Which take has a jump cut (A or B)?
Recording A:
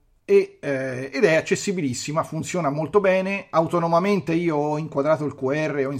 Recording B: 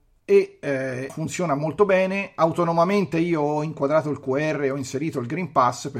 B